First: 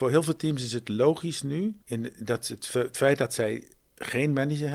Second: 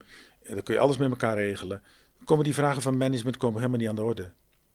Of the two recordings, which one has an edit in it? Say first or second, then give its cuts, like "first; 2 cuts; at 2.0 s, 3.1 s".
first; 1 cut; at 1.8 s